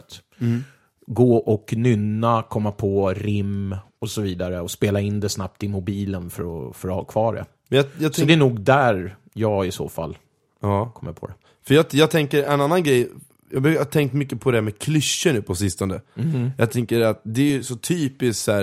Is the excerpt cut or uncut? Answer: uncut